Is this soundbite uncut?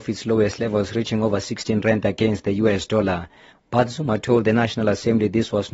yes; 0 cuts

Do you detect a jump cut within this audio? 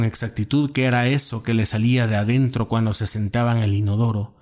no; 0 cuts

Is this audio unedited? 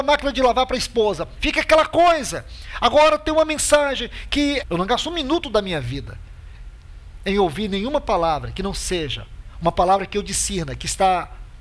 no; 2 cuts; at 1.4 s, 4.6 s

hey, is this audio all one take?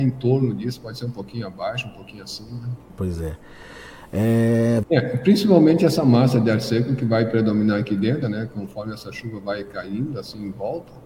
no; 3 cuts; at 2.9 s, 4.8 s, 8.2 s

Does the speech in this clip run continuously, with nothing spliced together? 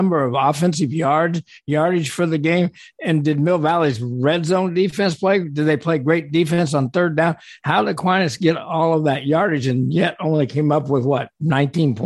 yes; 0 cuts

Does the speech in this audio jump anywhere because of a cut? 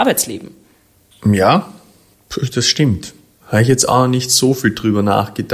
no; 0 cuts

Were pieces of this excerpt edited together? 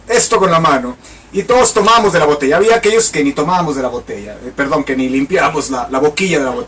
no; 0 cuts

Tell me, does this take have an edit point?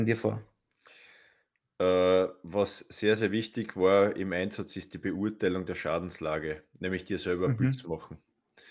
no; 0 cuts

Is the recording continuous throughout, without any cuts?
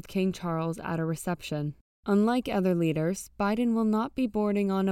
yes; 0 cuts

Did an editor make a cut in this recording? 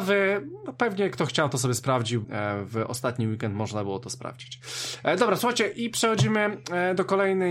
yes; 1 cut; at 2.2 s

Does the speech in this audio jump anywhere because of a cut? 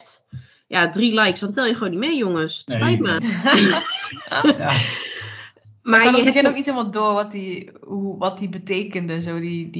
yes; 1 cut; at 3.2 s

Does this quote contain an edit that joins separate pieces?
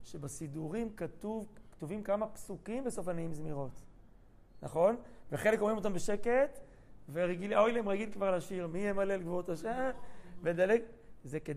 no; 0 cuts

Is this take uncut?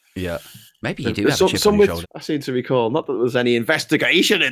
no; 1 cut; at 2.0 s

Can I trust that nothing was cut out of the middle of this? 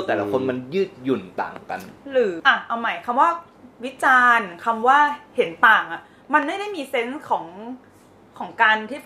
no; 1 cut; at 2.4 s

